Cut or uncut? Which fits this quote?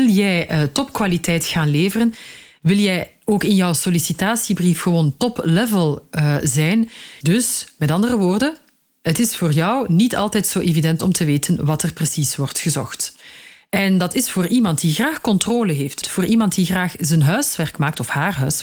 cut